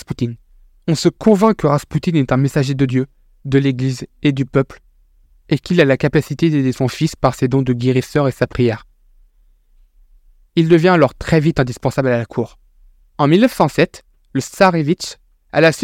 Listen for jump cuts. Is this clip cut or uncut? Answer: cut